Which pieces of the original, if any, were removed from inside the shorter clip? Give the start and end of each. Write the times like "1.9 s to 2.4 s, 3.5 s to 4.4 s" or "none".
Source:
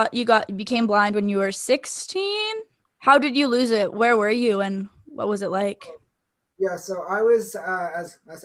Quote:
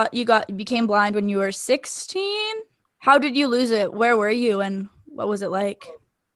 none